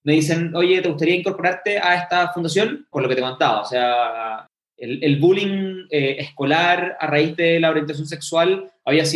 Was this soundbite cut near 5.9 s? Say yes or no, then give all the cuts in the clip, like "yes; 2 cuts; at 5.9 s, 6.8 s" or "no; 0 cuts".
no; 1 cut; at 2.9 s